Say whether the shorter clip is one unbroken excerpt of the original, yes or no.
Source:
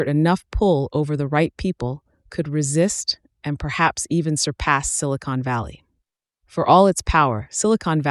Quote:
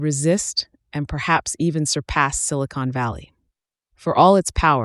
yes